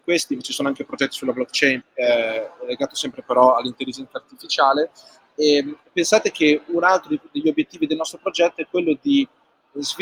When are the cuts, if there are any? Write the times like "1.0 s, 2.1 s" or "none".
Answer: 1.8 s